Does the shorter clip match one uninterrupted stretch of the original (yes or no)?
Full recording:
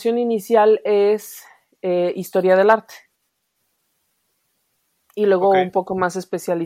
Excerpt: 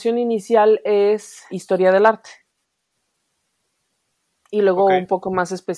no